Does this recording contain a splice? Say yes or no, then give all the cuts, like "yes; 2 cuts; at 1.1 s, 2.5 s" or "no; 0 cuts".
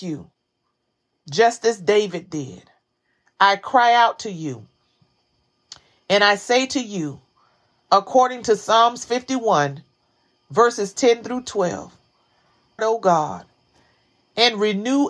yes; 1 cut; at 12.8 s